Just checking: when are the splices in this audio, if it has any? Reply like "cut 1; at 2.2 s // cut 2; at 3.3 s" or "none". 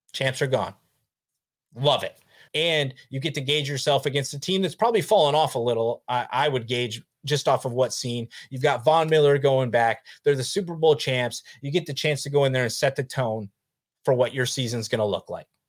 cut 1; at 2.5 s